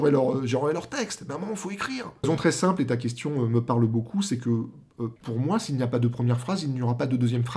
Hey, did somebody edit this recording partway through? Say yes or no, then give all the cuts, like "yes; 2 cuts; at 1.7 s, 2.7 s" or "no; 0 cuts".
yes; 2 cuts; at 2.2 s, 5.2 s